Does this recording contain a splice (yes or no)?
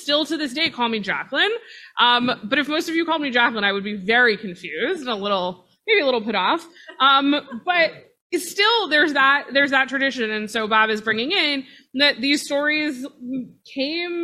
no